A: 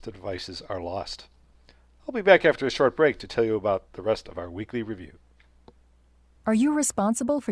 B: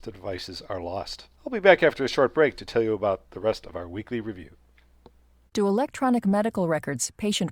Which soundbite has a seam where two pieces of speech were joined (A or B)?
B